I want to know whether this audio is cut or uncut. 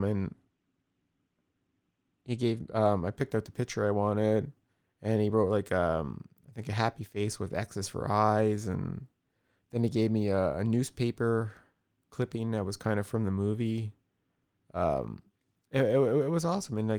uncut